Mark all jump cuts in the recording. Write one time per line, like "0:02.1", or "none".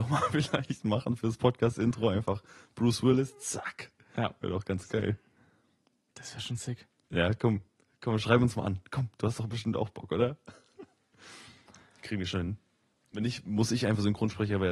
none